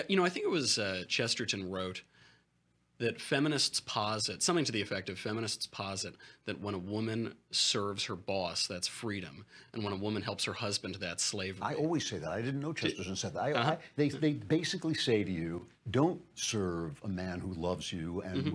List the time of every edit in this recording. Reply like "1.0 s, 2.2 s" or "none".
none